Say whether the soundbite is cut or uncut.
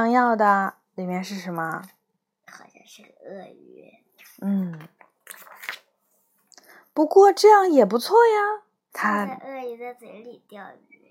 cut